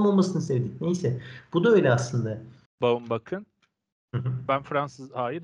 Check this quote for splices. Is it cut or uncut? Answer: cut